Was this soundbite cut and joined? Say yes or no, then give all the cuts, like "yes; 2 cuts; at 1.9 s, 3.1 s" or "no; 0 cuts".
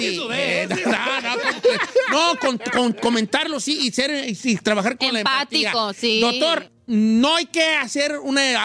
no; 0 cuts